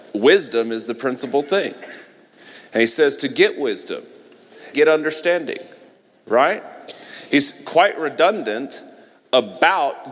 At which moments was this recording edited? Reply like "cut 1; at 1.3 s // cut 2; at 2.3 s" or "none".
cut 1; at 4.7 s